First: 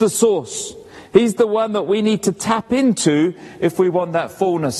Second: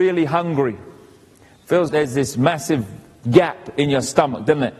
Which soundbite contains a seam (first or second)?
second